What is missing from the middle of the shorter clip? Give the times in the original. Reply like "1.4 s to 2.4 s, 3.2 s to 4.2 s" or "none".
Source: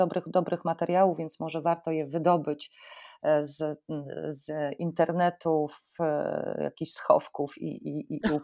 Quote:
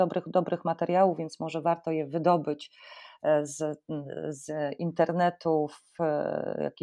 none